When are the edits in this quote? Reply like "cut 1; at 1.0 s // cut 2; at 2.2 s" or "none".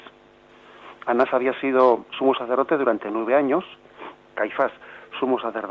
cut 1; at 4.2 s